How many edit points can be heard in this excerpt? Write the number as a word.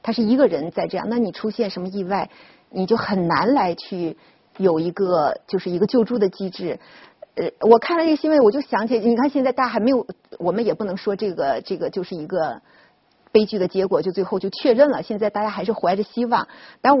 zero